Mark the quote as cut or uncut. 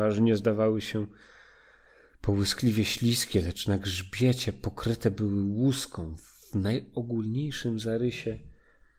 uncut